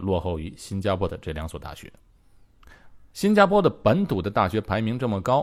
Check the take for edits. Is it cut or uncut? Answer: cut